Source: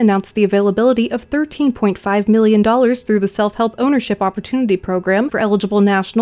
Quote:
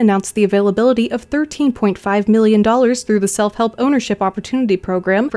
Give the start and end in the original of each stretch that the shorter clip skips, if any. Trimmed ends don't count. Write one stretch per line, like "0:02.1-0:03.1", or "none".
none